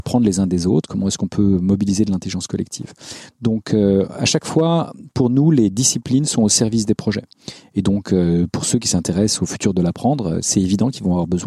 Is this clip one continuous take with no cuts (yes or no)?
yes